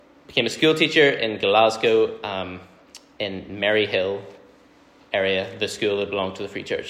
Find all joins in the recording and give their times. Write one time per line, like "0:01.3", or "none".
none